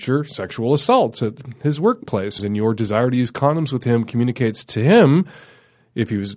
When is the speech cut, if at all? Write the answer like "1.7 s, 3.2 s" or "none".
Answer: 2.4 s